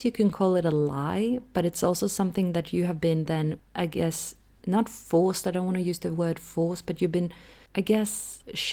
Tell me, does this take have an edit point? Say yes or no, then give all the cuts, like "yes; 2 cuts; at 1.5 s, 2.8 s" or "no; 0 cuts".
no; 0 cuts